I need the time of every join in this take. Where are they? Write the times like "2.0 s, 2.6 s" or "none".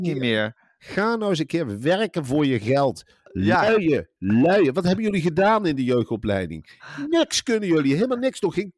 none